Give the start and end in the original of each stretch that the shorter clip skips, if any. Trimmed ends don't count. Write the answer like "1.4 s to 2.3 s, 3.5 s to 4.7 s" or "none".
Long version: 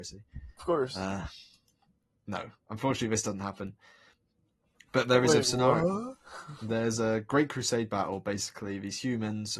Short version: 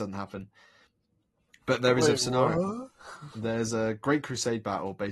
none